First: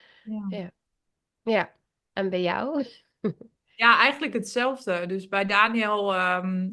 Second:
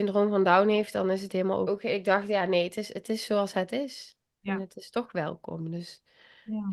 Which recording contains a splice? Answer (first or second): second